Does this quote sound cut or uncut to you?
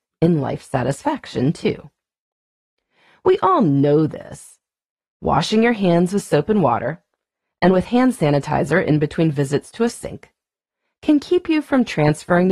uncut